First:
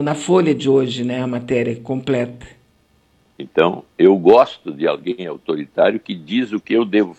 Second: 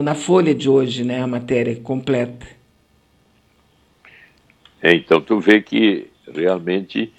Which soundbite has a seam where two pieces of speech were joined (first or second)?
first